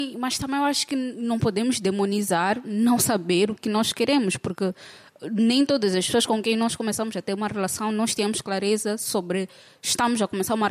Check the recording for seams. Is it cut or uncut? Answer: cut